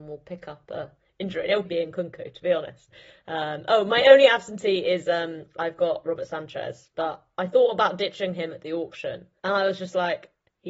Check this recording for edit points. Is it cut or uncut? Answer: cut